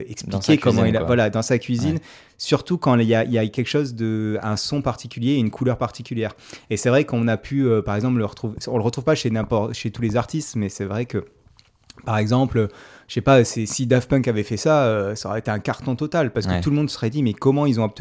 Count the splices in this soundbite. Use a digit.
0